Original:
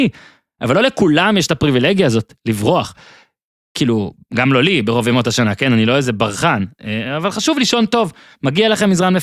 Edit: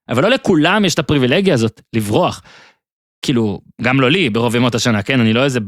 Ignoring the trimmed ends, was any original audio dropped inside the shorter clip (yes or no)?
no